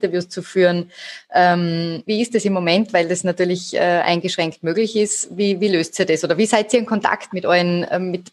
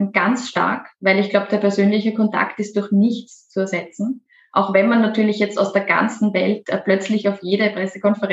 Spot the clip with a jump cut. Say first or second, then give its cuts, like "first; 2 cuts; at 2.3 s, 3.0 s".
first; 1 cut; at 2.1 s